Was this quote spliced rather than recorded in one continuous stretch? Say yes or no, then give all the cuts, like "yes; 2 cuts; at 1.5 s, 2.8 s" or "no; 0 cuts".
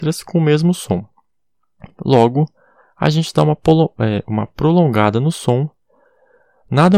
no; 0 cuts